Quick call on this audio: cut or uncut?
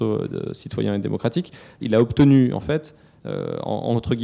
cut